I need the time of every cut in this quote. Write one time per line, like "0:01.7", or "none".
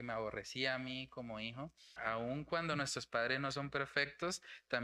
0:02.0